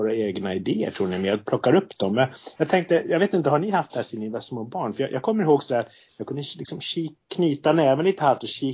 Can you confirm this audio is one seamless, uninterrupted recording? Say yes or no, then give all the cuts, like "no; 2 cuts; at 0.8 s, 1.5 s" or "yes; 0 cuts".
yes; 0 cuts